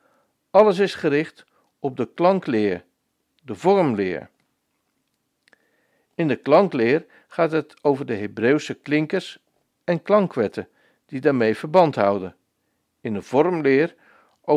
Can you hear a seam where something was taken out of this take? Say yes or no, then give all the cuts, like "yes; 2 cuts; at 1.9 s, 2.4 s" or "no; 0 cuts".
no; 0 cuts